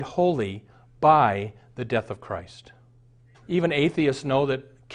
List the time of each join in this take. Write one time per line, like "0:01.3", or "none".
0:03.3